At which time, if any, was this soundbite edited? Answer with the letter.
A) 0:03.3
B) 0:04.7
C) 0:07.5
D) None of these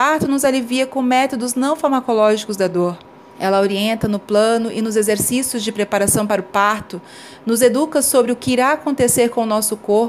A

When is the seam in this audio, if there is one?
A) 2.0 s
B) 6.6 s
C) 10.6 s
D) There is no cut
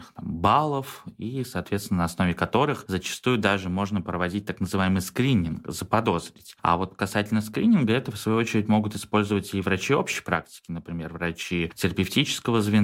D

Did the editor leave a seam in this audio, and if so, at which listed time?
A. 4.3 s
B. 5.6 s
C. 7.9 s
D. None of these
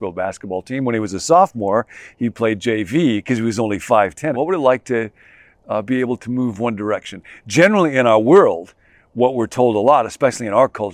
A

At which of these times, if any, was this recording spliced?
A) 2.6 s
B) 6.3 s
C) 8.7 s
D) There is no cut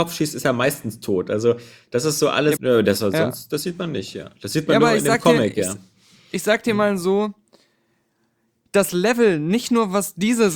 A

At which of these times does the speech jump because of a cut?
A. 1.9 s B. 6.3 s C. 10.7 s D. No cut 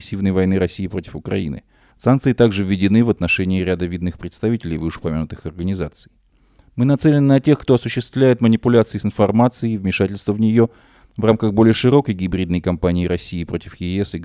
A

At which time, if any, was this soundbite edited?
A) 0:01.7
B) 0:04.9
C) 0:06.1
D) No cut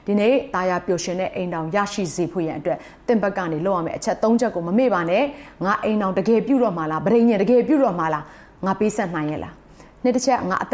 D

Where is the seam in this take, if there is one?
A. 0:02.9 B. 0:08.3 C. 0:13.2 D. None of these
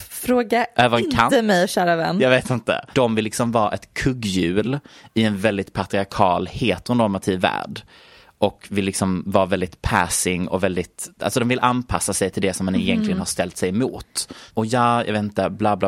A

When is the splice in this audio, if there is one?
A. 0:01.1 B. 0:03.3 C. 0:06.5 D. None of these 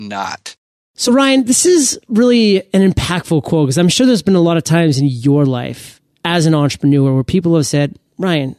D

